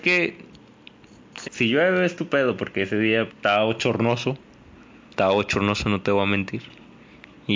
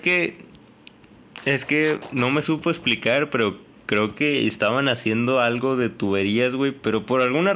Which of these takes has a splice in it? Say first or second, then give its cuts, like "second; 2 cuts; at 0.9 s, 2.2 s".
first; 2 cuts; at 1.4 s, 3.3 s